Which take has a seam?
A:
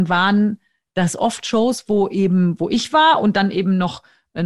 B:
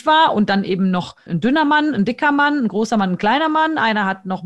B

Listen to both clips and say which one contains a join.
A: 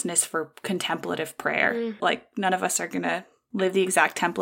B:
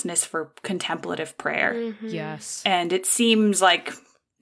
A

